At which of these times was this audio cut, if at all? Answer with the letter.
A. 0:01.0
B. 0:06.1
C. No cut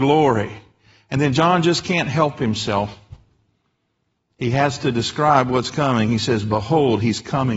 C